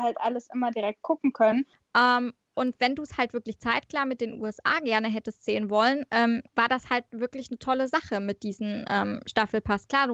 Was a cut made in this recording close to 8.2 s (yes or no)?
no